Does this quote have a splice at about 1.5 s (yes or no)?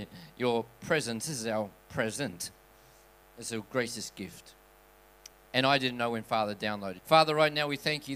no